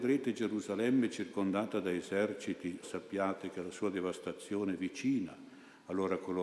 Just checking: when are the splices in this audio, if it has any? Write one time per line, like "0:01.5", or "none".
0:02.8